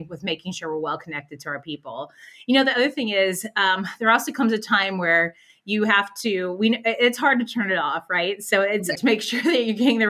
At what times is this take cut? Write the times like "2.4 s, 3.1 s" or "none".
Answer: 9.0 s